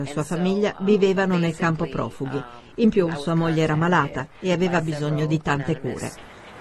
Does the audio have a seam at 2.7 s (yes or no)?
no